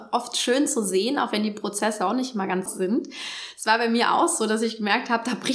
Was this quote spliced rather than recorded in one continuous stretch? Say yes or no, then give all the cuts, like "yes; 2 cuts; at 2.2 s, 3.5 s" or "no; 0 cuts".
yes; 1 cut; at 2.7 s